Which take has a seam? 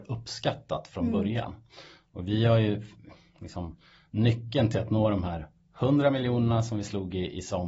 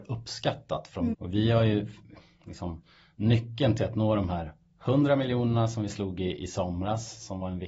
second; 1 cut; at 1.1 s

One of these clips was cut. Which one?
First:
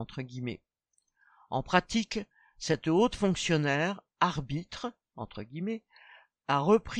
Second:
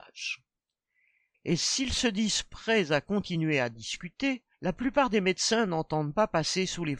second; 2 cuts; at 1.3 s, 4.5 s

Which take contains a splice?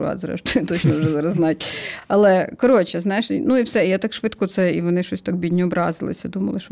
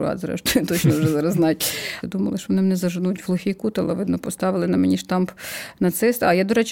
second; 1 cut; at 2.0 s

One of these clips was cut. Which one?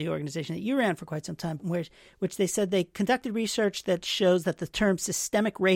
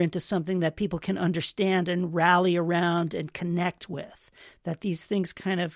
first; 1 cut; at 1.6 s

